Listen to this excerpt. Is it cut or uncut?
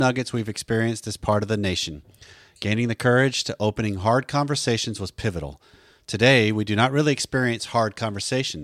uncut